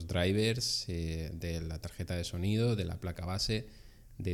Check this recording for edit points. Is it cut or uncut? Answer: uncut